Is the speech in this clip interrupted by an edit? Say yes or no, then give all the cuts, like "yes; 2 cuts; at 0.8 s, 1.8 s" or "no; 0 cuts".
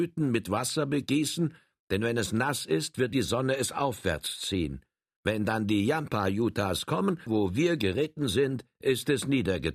yes; 2 cuts; at 5.2 s, 7.3 s